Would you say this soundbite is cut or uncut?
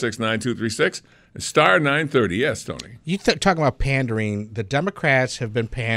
uncut